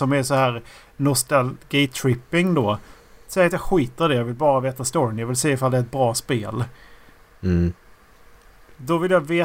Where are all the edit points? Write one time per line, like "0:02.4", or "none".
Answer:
none